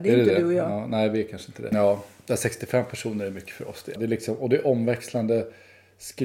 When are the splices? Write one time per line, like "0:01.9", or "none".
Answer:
0:01.7
0:04.0